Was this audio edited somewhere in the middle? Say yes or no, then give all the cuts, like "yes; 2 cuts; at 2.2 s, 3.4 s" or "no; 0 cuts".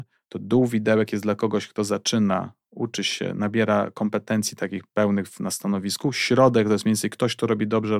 no; 0 cuts